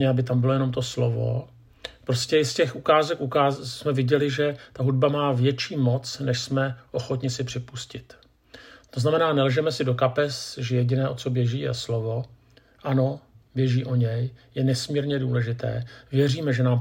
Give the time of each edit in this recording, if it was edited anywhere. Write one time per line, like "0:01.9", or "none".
none